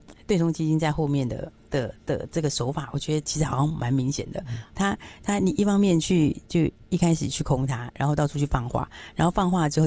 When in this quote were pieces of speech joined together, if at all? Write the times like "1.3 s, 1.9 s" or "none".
none